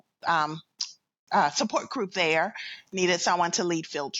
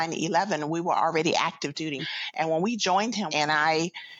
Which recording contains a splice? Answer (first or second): second